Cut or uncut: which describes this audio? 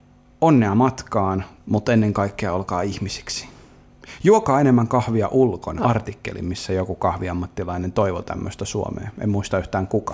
cut